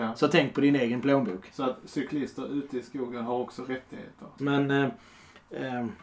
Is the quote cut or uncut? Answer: cut